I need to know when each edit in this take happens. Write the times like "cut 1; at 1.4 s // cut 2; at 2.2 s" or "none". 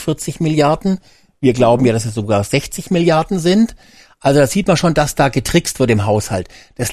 none

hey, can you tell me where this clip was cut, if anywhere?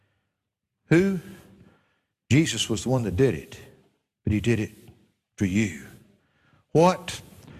none

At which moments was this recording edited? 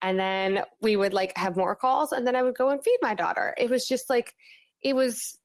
none

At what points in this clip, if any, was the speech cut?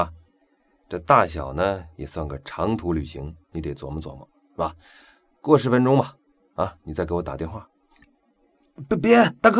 none

